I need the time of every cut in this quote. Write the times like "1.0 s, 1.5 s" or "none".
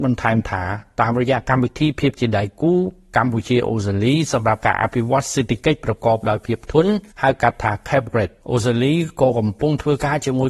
7.1 s, 8.4 s